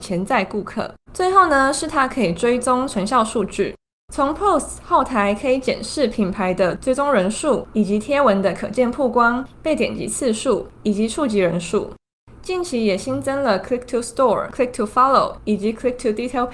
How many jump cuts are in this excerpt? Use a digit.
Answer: 1